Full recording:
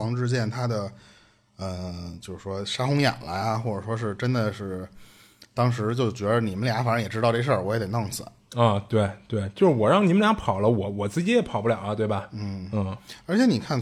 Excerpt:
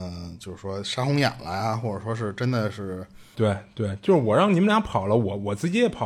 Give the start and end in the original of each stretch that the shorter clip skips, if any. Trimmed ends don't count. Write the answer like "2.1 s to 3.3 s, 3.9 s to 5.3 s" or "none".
5.2 s to 8.9 s

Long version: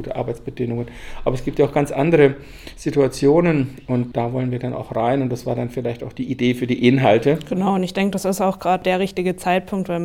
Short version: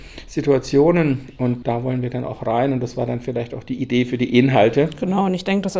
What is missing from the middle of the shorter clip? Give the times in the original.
none

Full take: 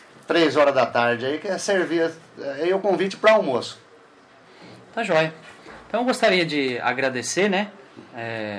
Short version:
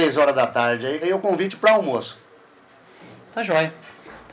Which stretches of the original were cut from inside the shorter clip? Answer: 1.4 s to 2.6 s

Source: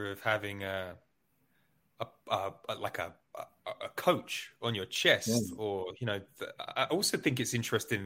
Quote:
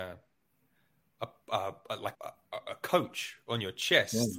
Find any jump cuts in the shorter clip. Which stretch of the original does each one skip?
2.9 s to 3.3 s

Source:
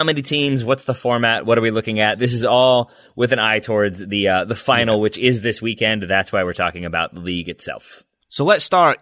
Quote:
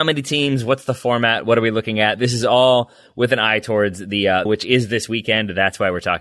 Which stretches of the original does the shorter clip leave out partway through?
4.5 s to 5.0 s

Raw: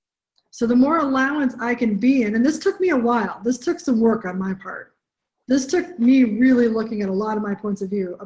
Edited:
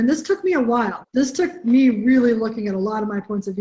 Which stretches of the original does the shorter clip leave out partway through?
3.4 s to 5.4 s

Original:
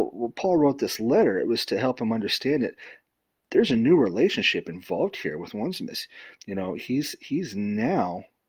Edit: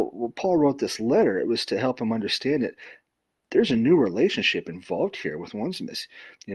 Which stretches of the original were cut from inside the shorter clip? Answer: none

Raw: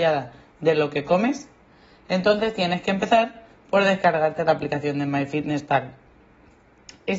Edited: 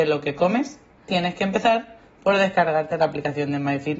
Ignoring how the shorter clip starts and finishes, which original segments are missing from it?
1.8 s to 2.6 s

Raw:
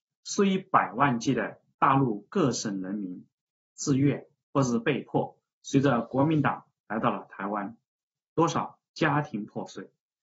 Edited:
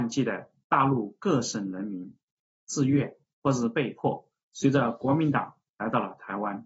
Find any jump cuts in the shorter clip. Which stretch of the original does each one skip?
none

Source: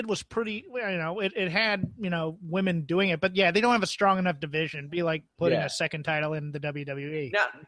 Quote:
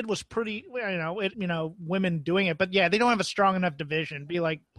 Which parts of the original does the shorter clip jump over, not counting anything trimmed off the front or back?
1.3 s to 2.0 s

